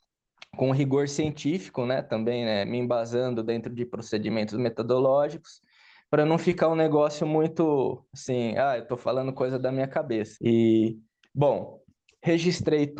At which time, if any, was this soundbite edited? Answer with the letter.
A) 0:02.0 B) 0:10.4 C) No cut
B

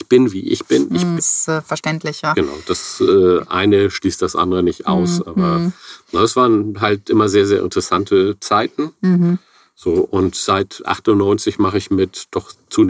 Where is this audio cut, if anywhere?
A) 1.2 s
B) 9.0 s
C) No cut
A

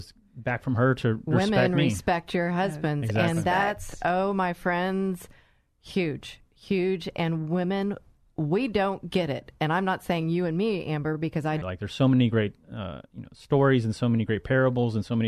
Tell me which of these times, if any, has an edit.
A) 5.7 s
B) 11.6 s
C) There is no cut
B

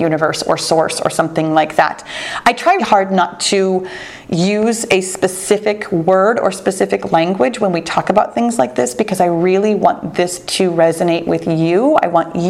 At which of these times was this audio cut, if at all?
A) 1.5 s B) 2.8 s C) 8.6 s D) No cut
B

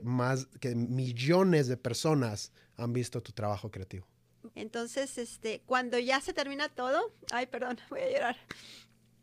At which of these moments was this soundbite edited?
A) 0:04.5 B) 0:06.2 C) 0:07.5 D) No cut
A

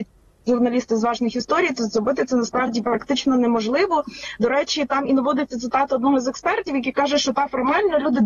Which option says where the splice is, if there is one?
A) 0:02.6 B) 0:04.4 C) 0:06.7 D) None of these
D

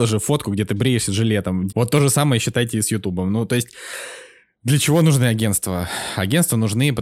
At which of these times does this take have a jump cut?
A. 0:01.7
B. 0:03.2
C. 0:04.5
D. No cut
A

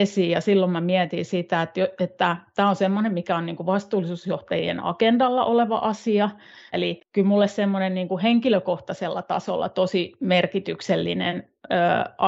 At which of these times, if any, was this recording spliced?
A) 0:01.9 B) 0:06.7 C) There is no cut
B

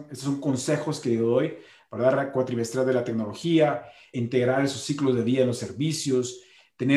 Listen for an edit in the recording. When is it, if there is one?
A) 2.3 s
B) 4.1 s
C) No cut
B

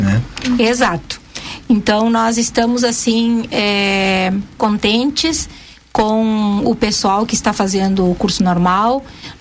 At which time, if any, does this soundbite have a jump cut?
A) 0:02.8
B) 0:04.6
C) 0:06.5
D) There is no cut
B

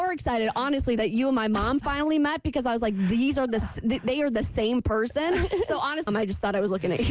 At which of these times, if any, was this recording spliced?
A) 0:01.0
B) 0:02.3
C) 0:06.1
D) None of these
C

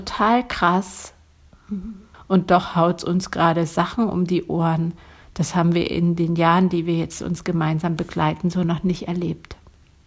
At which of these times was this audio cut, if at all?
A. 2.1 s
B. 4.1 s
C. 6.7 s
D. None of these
A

